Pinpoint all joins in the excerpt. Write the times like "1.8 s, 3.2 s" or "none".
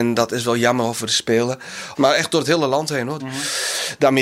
1.9 s, 3.2 s

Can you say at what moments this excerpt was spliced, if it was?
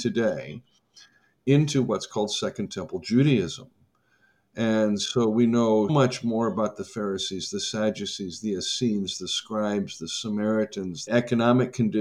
5.9 s, 11.1 s

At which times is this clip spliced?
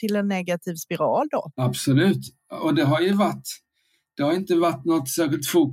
1.5 s

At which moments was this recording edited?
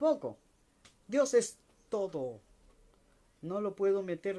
none

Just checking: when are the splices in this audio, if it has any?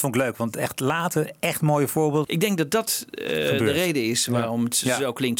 2.2 s

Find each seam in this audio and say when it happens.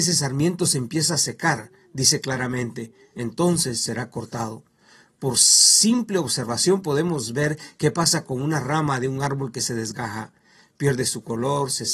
none

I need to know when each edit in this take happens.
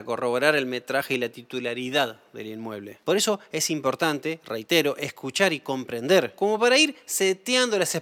3.0 s

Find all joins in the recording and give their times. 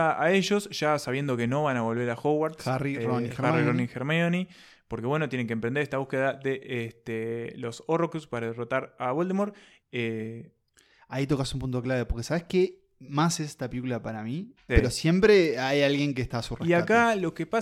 9.8 s, 14.7 s

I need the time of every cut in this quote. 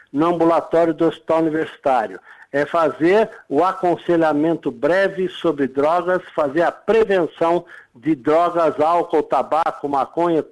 none

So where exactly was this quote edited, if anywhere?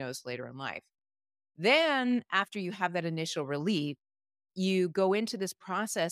none

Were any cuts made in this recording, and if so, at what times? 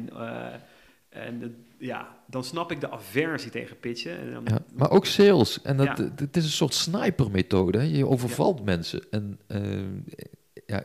none

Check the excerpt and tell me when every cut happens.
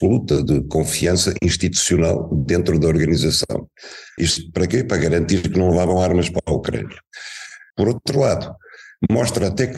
4.2 s, 7.7 s

